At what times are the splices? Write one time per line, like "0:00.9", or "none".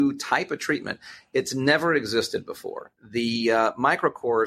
0:03.0